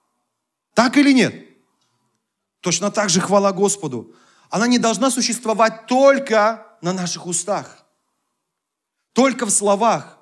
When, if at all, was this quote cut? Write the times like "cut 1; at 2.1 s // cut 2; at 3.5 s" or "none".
none